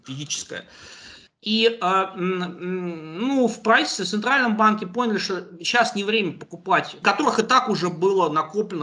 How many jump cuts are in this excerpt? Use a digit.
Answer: 2